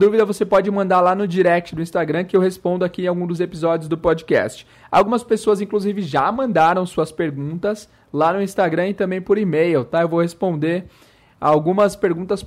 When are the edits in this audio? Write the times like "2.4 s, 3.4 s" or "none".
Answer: none